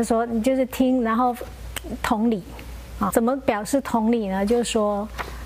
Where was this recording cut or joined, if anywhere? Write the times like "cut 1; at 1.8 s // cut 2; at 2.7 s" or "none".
cut 1; at 3.1 s